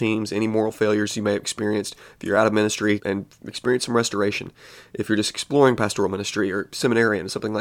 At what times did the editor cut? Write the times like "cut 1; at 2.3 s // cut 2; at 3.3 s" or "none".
cut 1; at 3.0 s